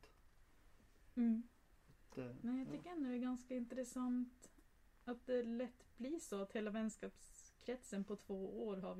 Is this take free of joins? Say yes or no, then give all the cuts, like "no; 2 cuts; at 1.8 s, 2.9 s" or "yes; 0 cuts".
yes; 0 cuts